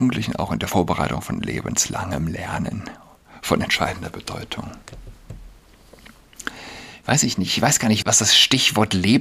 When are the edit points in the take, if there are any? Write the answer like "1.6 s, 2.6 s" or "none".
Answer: 8.0 s